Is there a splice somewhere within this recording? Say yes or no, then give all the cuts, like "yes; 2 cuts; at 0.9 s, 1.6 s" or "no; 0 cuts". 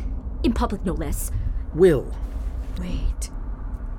yes; 2 cuts; at 1.7 s, 2.8 s